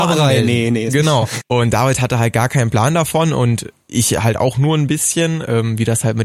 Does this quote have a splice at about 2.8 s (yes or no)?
no